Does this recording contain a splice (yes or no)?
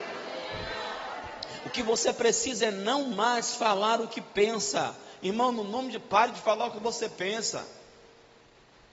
no